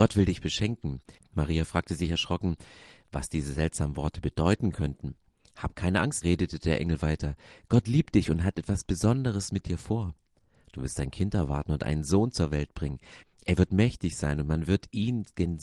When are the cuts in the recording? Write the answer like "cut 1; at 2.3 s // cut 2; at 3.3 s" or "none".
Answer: cut 1; at 1.2 s // cut 2; at 6.2 s // cut 3; at 13.2 s